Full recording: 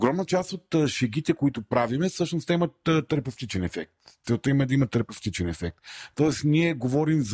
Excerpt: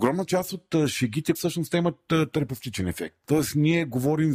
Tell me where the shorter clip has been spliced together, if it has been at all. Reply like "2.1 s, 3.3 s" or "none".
1.3 s, 3.2 s

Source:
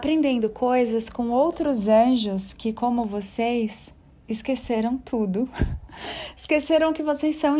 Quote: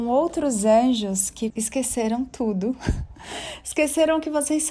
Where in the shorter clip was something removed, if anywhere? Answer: 1.5 s

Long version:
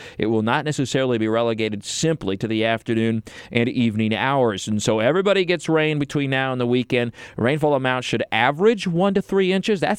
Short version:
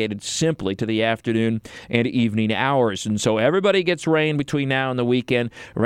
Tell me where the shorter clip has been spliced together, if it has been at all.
none

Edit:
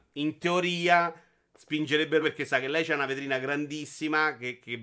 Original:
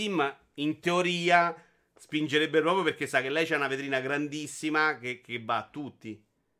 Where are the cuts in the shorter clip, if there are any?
2.2 s

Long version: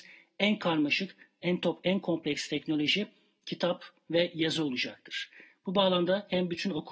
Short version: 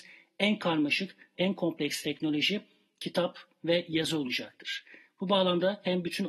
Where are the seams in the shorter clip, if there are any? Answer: 1.3 s

